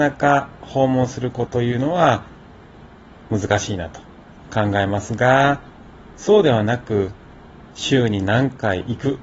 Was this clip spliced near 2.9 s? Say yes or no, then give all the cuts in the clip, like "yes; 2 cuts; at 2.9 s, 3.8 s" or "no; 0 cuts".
no; 1 cut; at 1.5 s